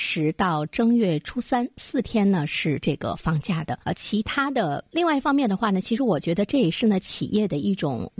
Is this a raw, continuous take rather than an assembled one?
no; 2 cuts; at 3.8 s, 4.9 s

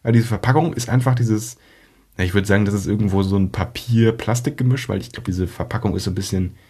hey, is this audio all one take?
no; 1 cut; at 5.3 s

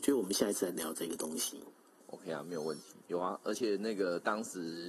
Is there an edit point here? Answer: yes; 1 cut; at 3.0 s

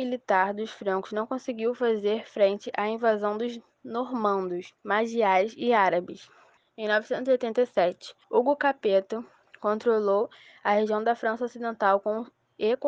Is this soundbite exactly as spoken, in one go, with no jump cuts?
no; 3 cuts; at 4.8 s, 6.6 s, 8.2 s

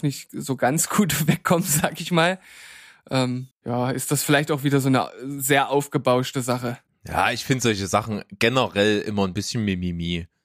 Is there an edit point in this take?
yes; 1 cut; at 3.5 s

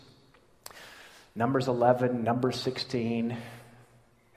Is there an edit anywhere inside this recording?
no; 0 cuts

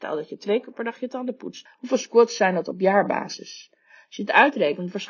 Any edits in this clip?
yes; 1 cut; at 1.7 s

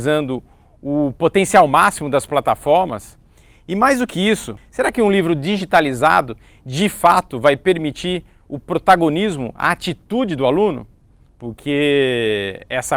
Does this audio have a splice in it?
yes; 1 cut; at 11.3 s

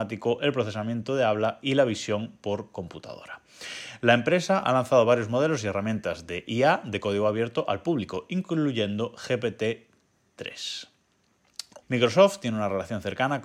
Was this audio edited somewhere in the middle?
yes; 1 cut; at 11.8 s

